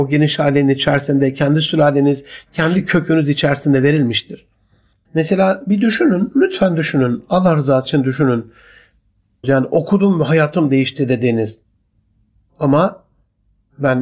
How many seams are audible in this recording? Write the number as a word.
two